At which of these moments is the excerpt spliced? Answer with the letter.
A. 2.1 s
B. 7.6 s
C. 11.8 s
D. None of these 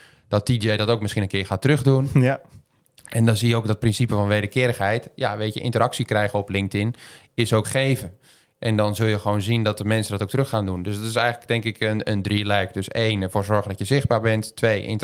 B